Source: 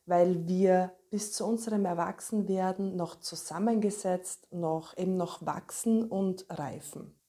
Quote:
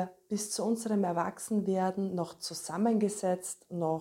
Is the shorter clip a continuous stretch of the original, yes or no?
yes